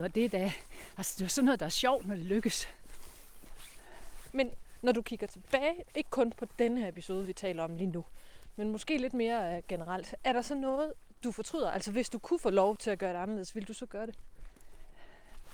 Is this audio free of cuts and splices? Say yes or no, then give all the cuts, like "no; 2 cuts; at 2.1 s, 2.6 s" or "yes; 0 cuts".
yes; 0 cuts